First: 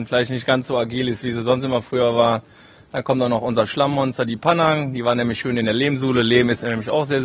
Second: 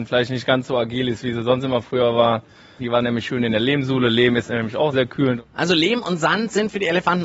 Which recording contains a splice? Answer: second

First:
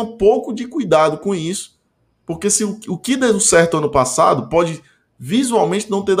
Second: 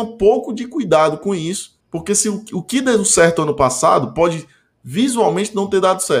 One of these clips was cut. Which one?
second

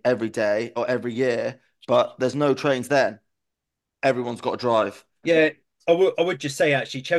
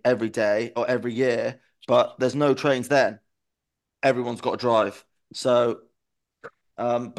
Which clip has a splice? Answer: first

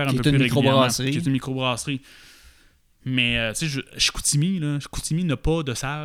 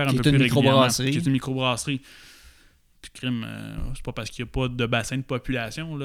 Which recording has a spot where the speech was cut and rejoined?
second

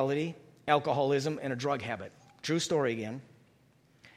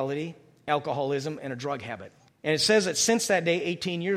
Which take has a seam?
second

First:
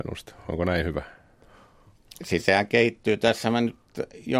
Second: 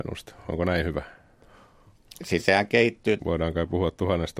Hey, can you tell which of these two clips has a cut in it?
second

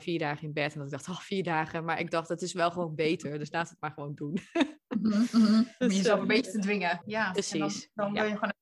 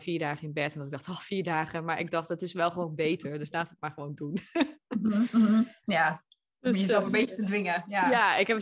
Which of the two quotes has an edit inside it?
first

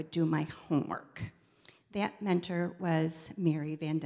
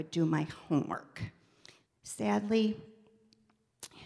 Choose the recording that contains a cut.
second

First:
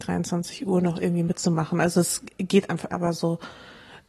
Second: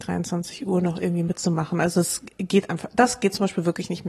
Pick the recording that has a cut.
first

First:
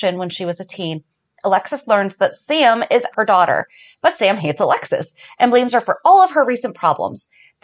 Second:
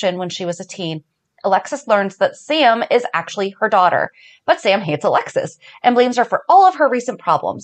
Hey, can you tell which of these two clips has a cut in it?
first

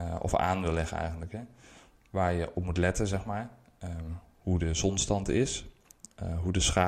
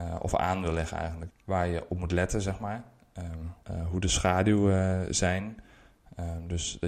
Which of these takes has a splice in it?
second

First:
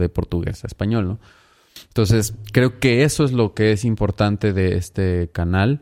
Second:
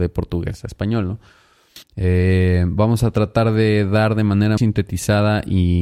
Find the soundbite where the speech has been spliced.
second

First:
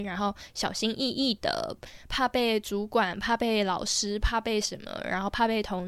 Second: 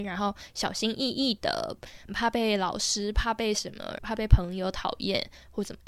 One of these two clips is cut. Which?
second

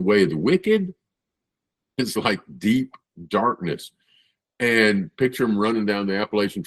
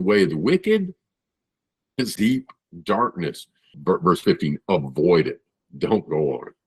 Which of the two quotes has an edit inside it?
second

